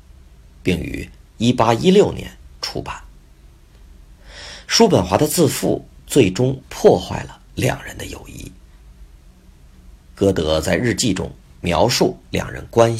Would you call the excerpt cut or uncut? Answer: uncut